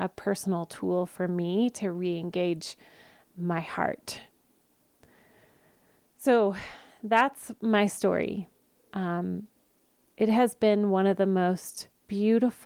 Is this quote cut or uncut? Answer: uncut